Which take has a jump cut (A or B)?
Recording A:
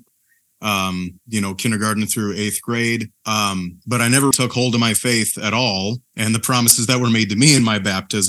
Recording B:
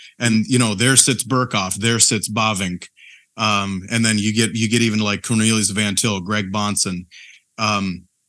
A